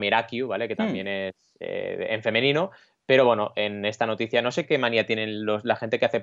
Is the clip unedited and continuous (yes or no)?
yes